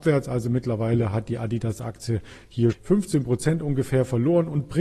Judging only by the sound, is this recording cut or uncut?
cut